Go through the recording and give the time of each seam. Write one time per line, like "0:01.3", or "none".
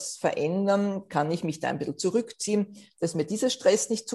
none